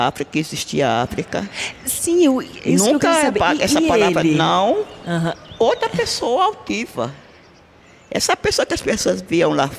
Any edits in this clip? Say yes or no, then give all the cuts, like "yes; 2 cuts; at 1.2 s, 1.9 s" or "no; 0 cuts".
no; 0 cuts